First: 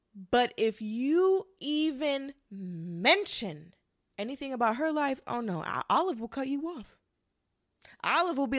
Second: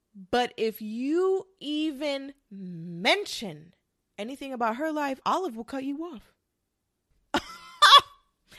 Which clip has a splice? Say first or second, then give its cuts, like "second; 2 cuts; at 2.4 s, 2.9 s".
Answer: second; 2 cuts; at 5.2 s, 7.1 s